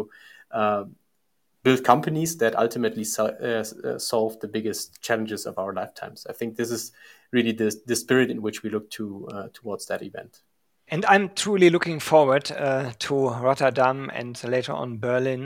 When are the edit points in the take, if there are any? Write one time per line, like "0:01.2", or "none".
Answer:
0:10.9

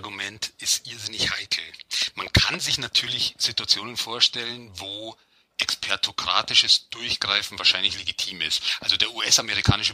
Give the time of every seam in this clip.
none

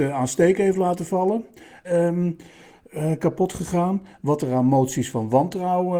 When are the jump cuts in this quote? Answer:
0:01.8

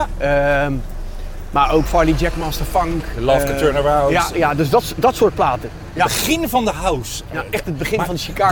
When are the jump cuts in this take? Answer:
0:01.8

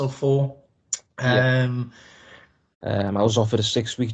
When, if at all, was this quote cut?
0:02.7

